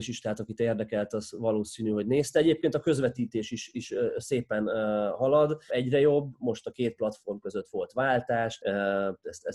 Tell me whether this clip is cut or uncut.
cut